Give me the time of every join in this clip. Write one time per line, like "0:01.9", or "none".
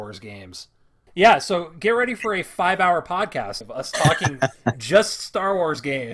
0:01.1
0:03.6